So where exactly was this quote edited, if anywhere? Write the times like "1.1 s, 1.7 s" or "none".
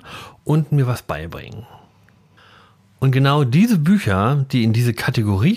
none

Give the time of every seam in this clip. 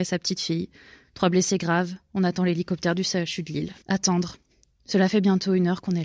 3.8 s

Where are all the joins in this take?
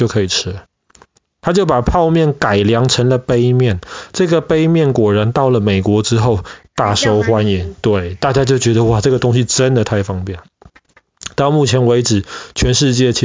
none

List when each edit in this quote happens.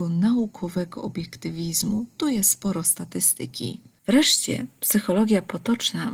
4.0 s

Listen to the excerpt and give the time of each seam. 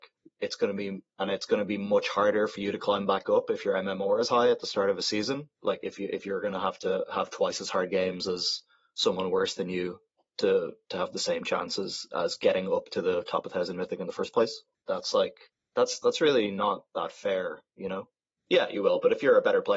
5.5 s, 14.8 s, 18.4 s

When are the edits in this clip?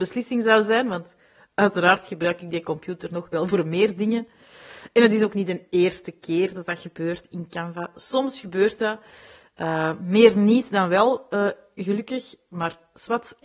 none

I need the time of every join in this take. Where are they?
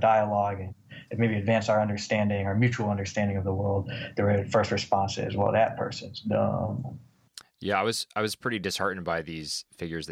none

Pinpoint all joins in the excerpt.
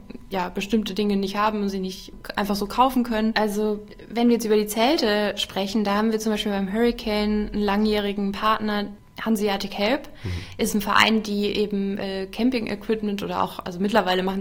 3.3 s

